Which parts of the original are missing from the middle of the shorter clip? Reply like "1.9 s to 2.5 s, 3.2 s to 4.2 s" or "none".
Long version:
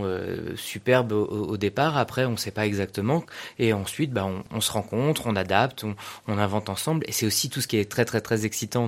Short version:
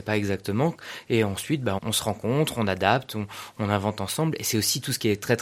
4.3 s to 4.5 s